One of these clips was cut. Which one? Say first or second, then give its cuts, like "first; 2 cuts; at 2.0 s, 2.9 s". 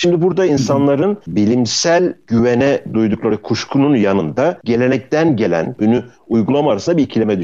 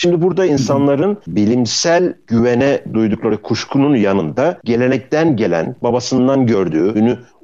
first; 1 cut; at 5.8 s